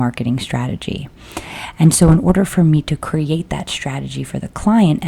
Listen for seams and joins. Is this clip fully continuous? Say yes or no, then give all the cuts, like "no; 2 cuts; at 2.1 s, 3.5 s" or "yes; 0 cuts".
yes; 0 cuts